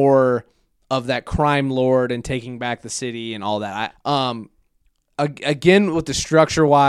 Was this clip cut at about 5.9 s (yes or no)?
no